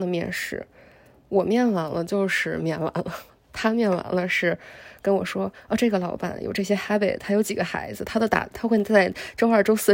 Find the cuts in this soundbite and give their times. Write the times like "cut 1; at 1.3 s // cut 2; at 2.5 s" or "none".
cut 1; at 8.5 s